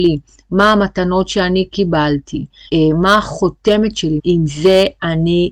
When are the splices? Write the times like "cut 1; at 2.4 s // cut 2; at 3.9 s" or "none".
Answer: cut 1; at 2.7 s // cut 2; at 4.2 s